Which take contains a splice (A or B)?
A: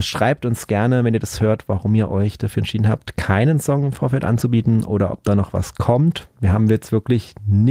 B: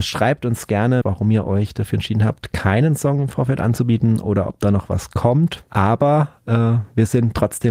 B